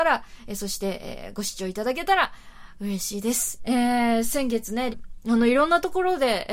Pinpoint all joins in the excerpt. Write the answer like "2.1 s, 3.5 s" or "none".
3.6 s, 4.9 s